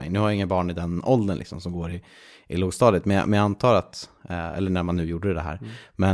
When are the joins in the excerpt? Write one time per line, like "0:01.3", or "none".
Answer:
none